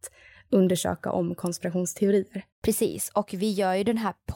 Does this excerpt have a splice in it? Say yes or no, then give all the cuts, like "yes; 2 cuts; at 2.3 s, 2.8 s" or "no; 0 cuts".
yes; 1 cut; at 2.5 s